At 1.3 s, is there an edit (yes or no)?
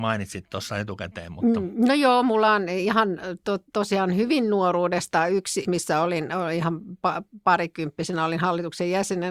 no